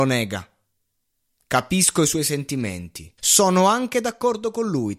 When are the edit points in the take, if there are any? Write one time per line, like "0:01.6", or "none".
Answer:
0:03.2